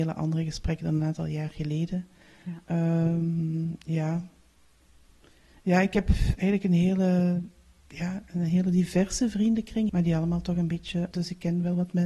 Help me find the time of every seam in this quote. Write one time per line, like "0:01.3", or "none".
0:09.9
0:11.1